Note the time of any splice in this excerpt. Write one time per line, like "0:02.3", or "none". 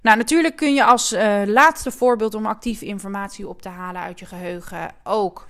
none